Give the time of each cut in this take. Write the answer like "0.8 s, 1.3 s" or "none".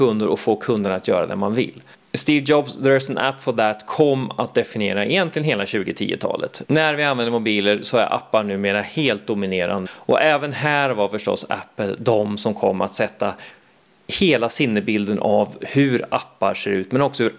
6.6 s, 9.9 s